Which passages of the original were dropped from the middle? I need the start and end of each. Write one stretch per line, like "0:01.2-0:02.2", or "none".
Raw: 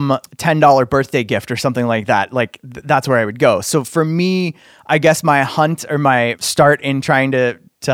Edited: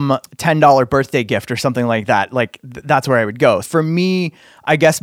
0:03.6-0:03.8